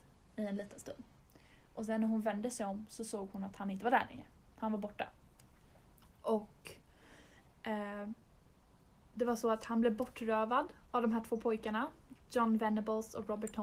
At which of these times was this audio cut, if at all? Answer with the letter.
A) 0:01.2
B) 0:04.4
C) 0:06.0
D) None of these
D